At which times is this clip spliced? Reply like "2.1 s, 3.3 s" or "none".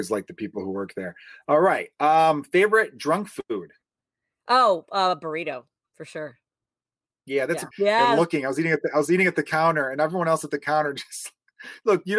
7.7 s